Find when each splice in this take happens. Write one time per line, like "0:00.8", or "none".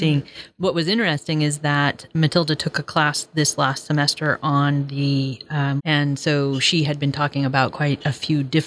0:05.8

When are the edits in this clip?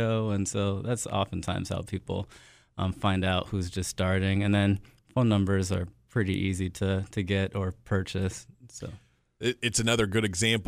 none

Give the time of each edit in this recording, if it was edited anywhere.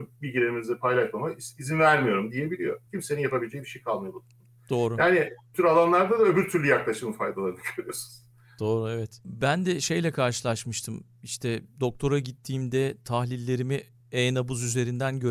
none

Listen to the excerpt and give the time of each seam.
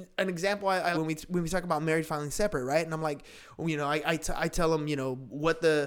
0:00.9

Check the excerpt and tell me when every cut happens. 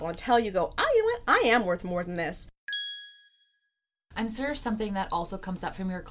none

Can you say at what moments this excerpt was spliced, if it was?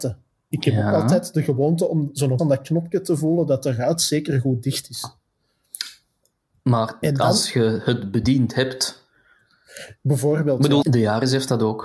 0:02.4
0:10.8

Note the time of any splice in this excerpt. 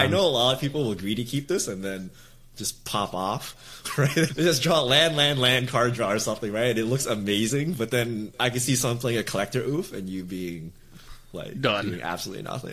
0:04.3

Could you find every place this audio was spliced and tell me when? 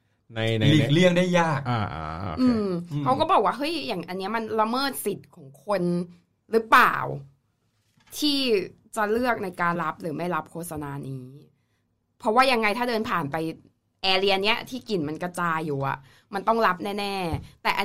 0:09.8

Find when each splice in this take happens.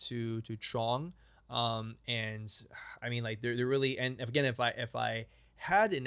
none

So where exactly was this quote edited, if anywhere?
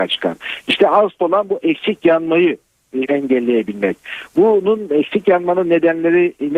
0:03.0

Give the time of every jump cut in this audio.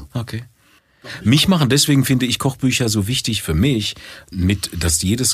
0:04.3

